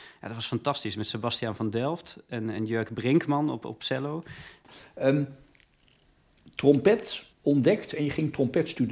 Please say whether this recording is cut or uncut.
cut